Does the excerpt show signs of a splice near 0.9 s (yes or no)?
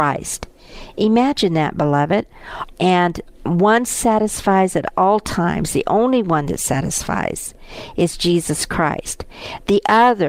no